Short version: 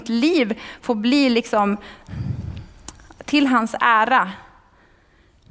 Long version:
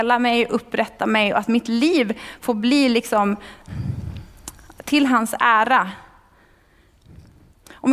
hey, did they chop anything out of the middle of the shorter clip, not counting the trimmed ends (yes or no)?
no